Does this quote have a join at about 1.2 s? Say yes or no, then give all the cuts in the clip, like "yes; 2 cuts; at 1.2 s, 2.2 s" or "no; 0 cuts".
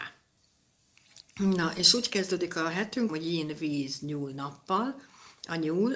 yes; 2 cuts; at 1.2 s, 3.1 s